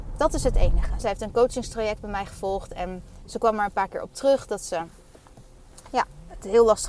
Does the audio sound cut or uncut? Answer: cut